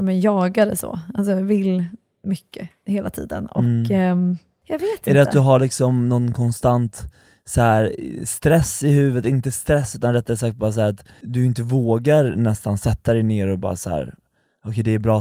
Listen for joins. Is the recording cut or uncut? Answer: uncut